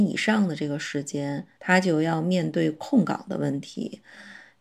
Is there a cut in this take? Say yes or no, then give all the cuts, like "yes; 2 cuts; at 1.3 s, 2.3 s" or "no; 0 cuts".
yes; 1 cut; at 1.6 s